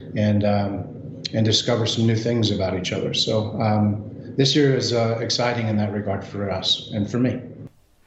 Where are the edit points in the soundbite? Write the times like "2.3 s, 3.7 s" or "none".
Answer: none